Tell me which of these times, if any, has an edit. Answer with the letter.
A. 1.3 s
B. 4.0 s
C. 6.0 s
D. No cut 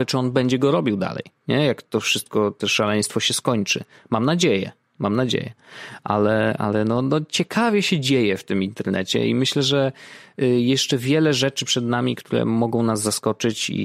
D